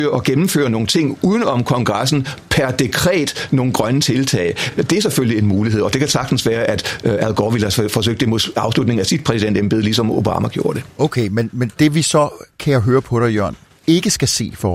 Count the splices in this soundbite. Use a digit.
0